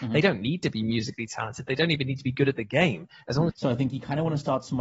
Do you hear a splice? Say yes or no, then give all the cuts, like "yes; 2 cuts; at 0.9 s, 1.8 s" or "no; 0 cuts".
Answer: yes; 1 cut; at 3.5 s